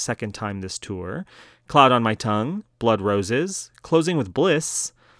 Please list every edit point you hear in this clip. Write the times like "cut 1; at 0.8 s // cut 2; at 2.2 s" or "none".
none